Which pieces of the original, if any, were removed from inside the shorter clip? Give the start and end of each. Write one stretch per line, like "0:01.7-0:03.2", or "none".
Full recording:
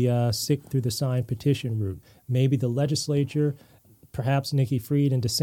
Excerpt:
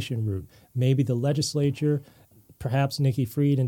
none